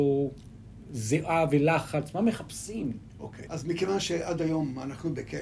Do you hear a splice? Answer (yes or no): yes